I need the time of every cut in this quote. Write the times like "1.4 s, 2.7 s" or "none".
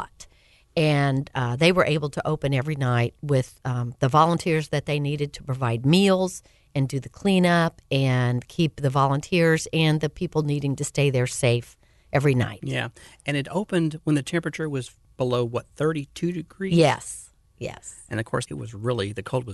18.5 s